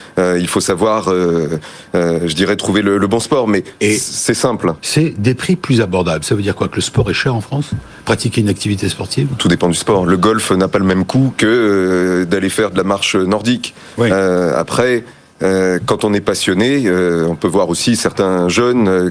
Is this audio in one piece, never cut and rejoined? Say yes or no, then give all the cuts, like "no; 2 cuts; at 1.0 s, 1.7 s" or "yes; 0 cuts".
no; 1 cut; at 4.8 s